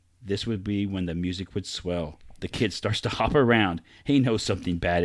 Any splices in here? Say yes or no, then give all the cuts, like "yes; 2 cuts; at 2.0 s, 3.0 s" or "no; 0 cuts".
no; 0 cuts